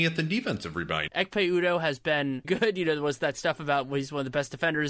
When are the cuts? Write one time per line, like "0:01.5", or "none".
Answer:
0:01.1
0:02.4